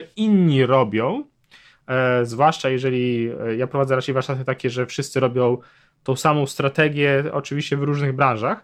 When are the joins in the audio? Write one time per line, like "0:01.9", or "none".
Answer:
none